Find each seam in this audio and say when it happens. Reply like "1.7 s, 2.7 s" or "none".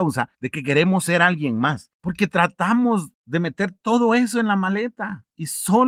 1.9 s